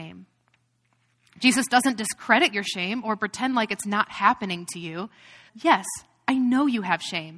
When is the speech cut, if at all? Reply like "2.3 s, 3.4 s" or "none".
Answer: 5.5 s